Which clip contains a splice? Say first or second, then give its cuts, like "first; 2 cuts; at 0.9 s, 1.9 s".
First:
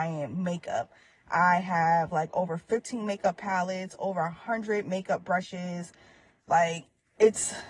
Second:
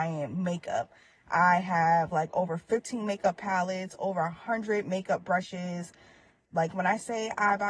first; 1 cut; at 6.4 s